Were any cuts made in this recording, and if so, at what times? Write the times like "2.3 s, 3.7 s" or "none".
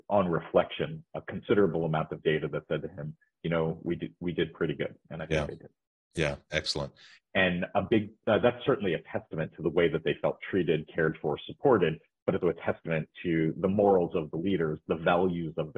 5.0 s, 7.2 s, 12.4 s

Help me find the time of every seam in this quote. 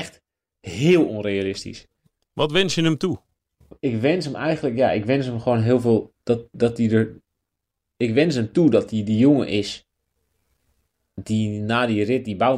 none

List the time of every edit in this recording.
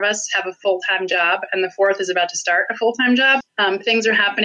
3.4 s

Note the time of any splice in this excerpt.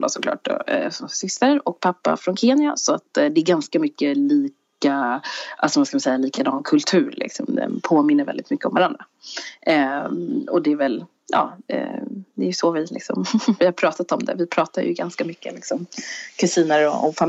none

